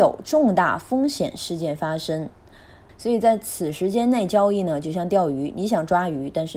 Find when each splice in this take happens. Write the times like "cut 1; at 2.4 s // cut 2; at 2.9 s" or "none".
cut 1; at 2.9 s